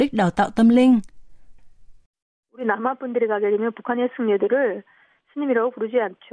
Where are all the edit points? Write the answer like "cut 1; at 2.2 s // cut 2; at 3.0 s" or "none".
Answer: cut 1; at 1.6 s